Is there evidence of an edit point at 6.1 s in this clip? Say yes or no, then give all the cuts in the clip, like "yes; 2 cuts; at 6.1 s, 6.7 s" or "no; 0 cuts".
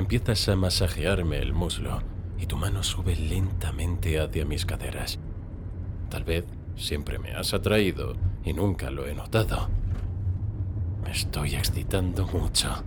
yes; 1 cut; at 6.1 s